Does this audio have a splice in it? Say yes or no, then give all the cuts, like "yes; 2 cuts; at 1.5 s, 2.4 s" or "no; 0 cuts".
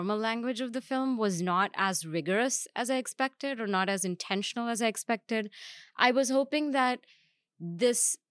no; 0 cuts